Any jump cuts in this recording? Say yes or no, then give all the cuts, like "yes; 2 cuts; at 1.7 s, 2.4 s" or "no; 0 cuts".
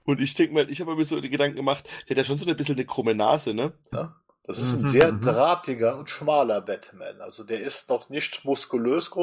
yes; 1 cut; at 3.9 s